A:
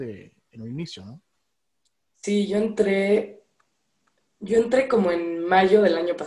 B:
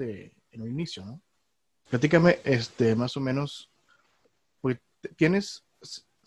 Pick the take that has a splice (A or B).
B